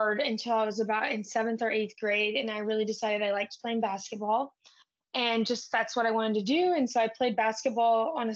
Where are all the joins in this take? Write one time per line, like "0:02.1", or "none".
none